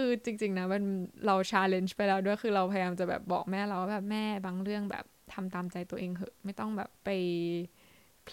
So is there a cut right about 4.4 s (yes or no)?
no